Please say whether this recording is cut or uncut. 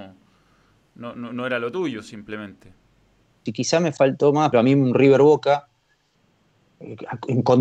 cut